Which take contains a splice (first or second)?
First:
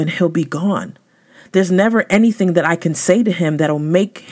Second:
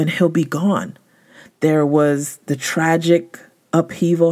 second